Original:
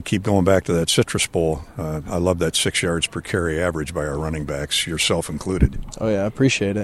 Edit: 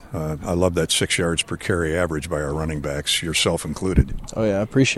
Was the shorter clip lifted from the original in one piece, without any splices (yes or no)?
yes